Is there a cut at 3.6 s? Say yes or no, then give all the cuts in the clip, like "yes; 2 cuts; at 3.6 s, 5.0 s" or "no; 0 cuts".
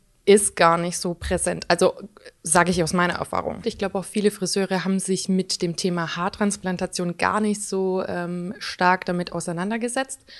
yes; 1 cut; at 3.6 s